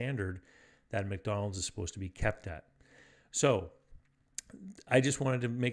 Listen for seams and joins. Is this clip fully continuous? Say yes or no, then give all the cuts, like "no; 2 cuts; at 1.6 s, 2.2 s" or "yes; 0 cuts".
yes; 0 cuts